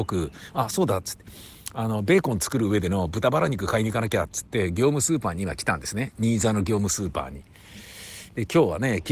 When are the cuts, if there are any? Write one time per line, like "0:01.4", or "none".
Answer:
none